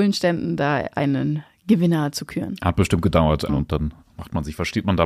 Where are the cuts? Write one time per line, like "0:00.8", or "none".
0:03.5

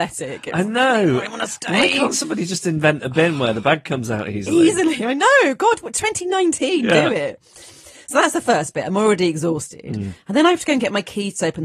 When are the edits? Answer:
none

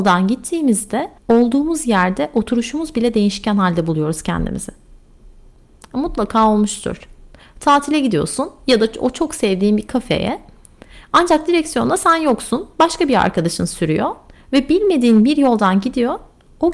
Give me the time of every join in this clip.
0:01.2

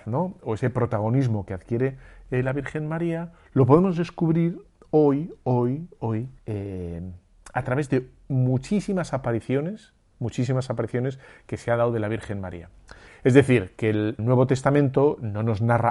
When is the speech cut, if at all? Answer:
0:06.4
0:13.1
0:14.2

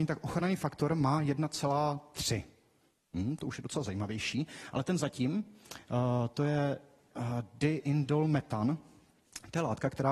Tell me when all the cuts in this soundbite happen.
none

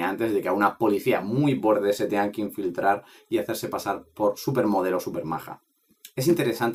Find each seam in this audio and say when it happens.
none

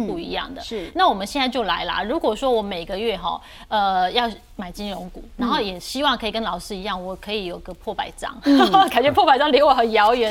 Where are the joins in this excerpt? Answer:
none

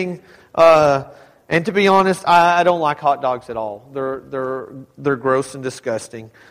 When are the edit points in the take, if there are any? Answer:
none

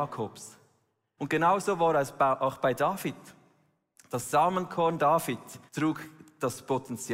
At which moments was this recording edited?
0:01.2
0:05.7

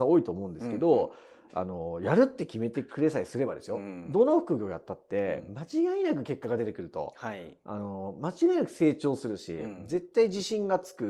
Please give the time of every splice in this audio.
none

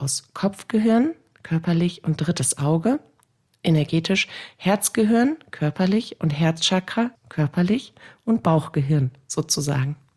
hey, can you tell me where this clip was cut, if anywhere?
0:07.1

